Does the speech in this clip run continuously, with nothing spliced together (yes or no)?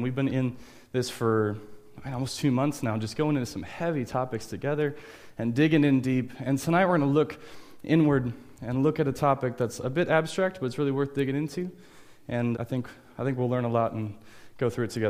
no